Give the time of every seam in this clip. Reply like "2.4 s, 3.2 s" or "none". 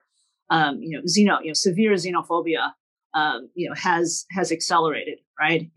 none

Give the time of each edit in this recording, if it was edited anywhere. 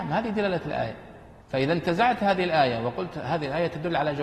1.4 s

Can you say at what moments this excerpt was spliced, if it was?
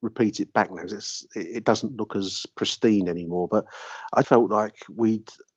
4.2 s

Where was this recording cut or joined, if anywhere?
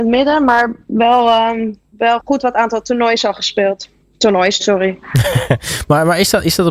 4.6 s

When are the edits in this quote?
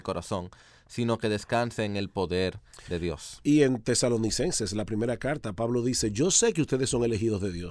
none

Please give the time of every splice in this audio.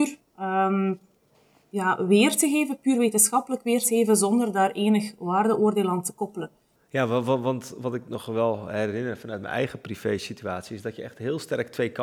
6.8 s

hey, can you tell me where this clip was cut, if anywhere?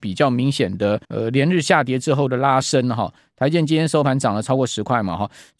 1.0 s

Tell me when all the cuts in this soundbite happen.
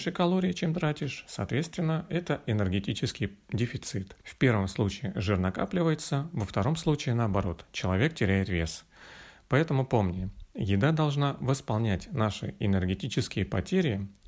4.2 s

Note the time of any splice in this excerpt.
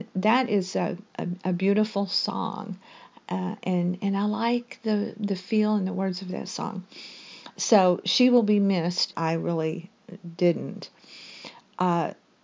9.1 s

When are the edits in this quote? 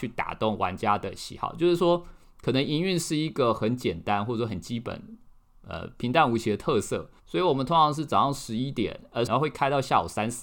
7.2 s, 9.3 s

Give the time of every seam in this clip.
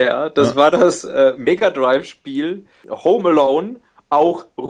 none

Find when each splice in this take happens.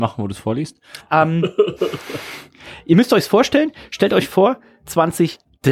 1.0 s

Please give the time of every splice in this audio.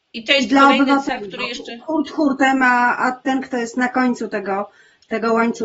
3.2 s

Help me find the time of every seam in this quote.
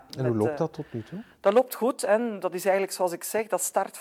none

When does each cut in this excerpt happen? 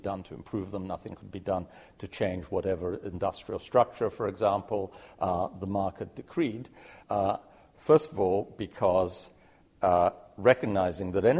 7.0 s

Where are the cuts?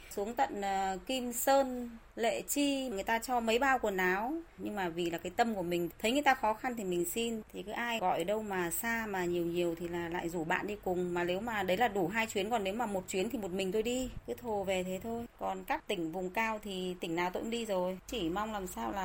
8.0 s, 15.4 s

